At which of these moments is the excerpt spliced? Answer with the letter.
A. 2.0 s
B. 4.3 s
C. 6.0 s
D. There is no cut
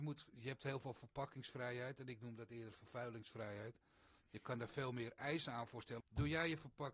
C